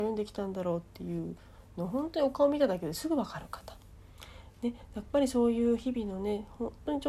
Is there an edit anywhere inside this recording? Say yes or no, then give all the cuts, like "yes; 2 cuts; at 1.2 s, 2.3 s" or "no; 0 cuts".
no; 0 cuts